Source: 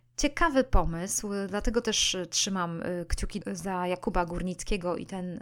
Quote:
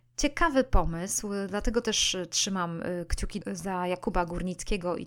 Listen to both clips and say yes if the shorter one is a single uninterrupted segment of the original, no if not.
yes